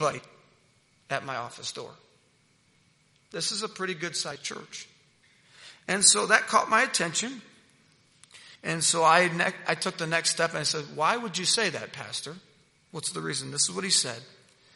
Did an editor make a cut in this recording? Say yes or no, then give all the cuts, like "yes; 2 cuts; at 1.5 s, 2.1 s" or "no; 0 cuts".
no; 0 cuts